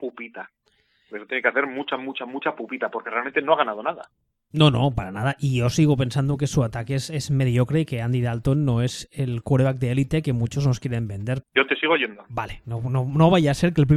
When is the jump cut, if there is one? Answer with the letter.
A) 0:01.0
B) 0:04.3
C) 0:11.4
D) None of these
C